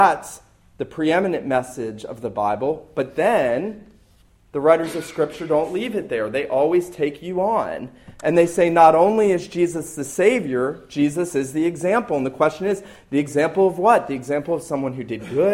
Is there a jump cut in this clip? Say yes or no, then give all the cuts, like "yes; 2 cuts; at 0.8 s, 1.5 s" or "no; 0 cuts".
no; 0 cuts